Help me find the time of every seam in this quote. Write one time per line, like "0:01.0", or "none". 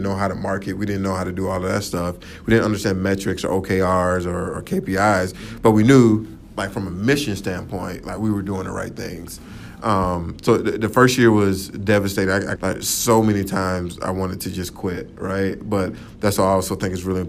0:12.6